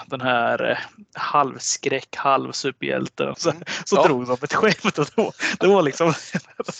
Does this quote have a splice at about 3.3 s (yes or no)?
yes